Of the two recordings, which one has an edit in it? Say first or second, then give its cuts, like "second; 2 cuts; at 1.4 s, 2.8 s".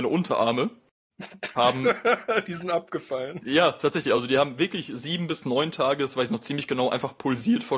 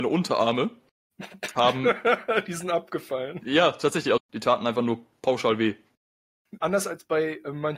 second; 2 cuts; at 4.2 s, 6.6 s